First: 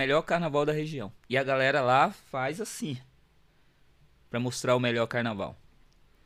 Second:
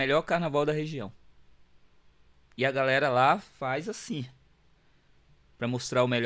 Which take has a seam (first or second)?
first